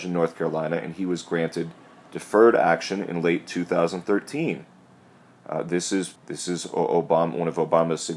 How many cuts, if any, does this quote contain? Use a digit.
1